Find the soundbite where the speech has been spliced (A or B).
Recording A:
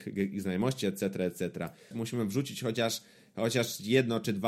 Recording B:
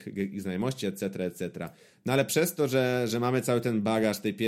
A